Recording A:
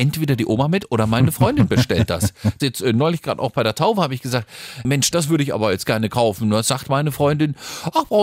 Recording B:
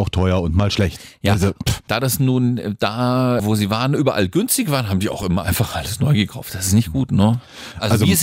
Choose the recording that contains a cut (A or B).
A